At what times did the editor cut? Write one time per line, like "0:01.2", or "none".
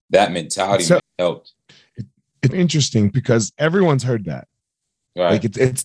0:01.0
0:02.5